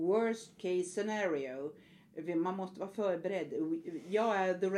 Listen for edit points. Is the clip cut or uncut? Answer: uncut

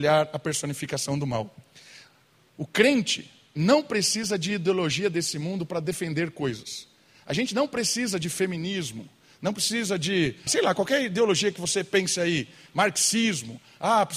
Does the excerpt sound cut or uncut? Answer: cut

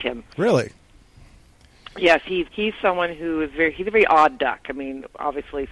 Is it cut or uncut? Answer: cut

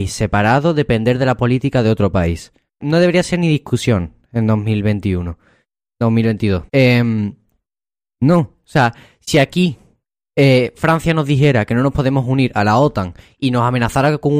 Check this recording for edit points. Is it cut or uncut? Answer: cut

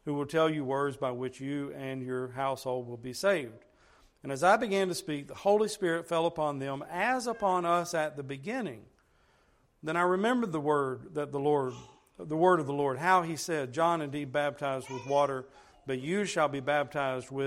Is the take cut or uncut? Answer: uncut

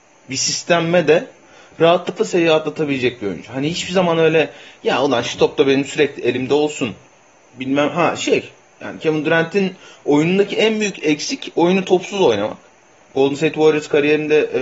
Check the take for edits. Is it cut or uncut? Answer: uncut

